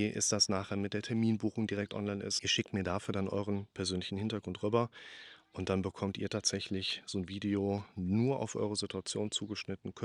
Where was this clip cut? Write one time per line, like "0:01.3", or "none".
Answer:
0:02.4